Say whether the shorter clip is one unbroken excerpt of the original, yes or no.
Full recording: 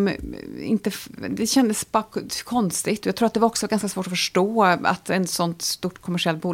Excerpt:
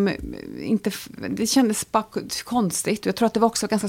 yes